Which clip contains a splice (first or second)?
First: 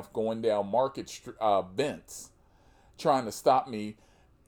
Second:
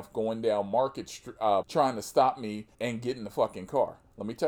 second